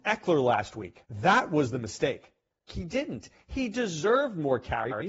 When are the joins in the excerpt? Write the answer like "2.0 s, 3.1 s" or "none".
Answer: 1.1 s, 2.7 s